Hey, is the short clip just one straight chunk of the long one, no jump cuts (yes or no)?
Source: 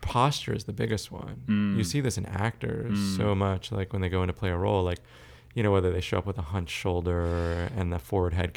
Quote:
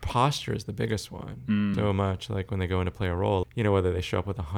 no